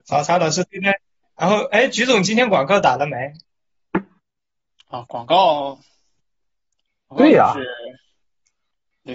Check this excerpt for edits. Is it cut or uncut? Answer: uncut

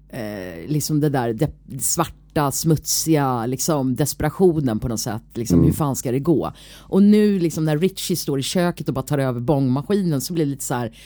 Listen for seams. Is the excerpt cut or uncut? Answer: uncut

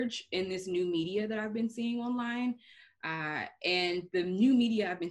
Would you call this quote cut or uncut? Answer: uncut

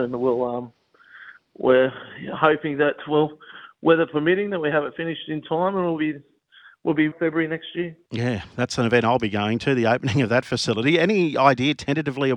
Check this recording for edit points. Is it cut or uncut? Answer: cut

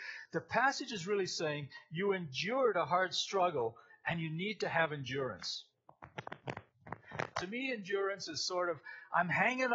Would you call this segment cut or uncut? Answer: cut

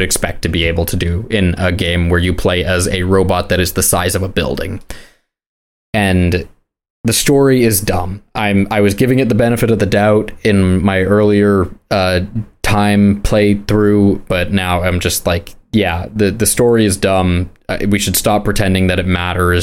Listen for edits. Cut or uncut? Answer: uncut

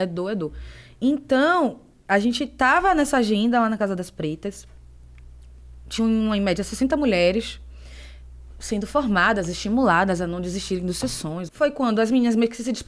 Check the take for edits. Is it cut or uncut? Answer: cut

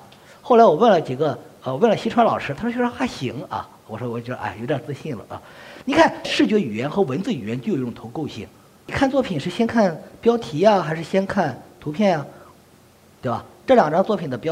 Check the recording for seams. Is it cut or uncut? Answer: uncut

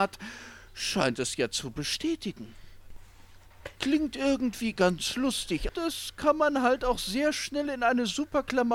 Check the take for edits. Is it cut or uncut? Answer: cut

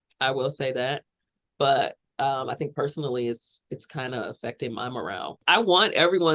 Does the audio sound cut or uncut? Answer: uncut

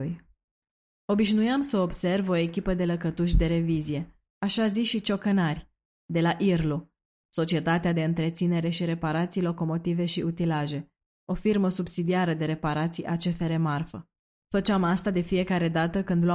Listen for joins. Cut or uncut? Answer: cut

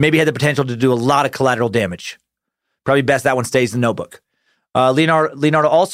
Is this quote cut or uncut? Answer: uncut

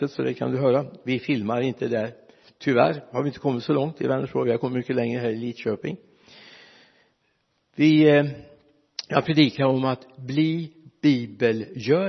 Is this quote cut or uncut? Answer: uncut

